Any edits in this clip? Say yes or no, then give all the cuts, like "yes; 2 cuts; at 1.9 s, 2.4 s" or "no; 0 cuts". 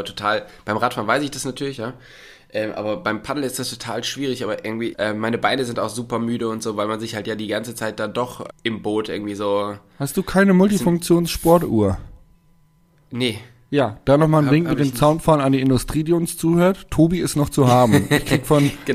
yes; 2 cuts; at 4.9 s, 8.5 s